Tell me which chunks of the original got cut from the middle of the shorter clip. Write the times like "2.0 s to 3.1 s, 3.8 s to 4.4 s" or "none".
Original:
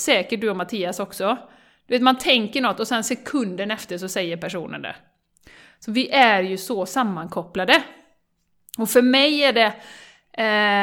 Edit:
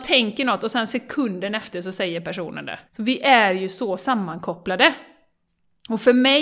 5.0 s to 5.7 s